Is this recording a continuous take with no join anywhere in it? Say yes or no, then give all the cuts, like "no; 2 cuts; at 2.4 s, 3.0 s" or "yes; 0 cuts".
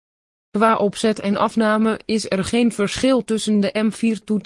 yes; 0 cuts